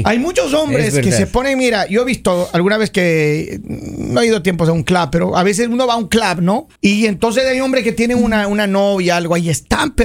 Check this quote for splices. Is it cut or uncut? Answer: cut